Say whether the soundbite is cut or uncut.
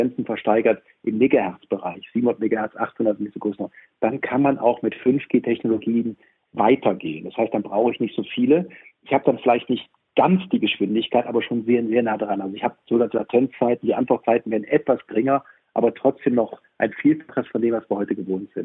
uncut